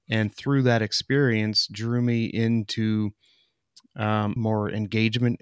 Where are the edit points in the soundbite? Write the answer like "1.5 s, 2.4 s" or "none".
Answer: 4.4 s